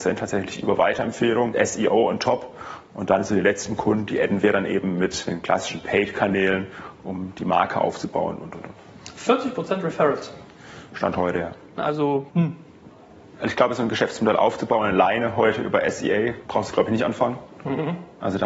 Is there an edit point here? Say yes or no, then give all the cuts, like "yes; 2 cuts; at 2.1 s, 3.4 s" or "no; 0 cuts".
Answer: yes; 1 cut; at 11.8 s